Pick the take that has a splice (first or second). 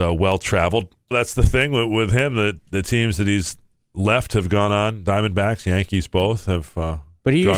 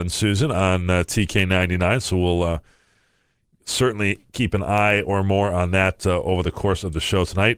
first